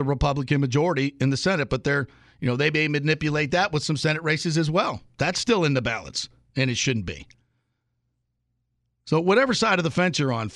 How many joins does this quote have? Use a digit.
0